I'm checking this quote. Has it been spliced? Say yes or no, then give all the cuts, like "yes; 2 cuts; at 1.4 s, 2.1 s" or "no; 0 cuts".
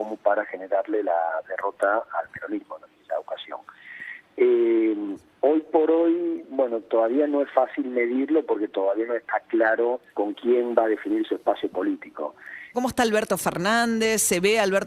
yes; 2 cuts; at 10.1 s, 12.7 s